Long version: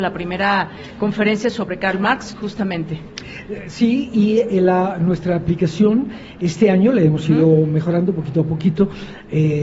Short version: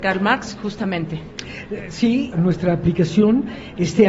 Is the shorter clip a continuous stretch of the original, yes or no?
no